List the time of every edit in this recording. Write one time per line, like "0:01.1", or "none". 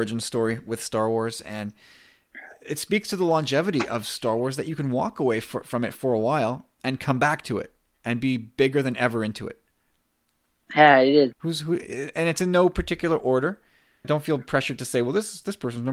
0:11.3
0:14.0